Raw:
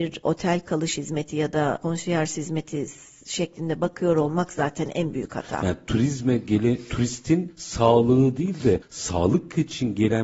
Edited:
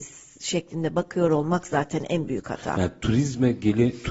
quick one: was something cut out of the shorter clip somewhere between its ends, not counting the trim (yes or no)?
no